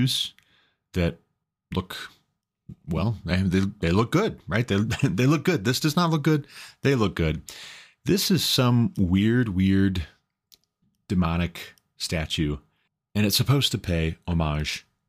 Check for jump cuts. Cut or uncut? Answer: uncut